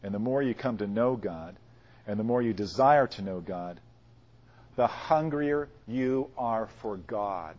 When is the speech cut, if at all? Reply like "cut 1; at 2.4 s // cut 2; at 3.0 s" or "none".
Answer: none